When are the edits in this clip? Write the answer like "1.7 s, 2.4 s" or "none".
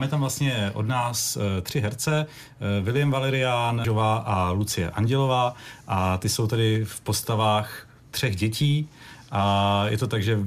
3.8 s